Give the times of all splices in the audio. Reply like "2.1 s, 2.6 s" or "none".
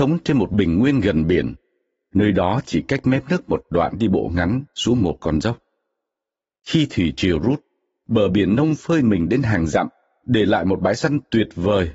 none